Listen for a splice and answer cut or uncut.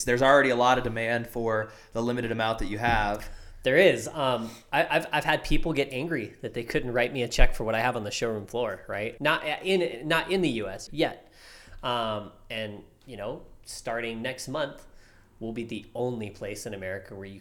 cut